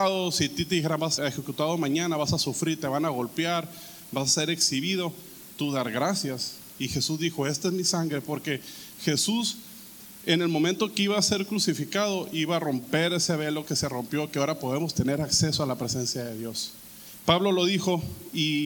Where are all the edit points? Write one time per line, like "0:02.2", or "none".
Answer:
0:01.2
0:17.2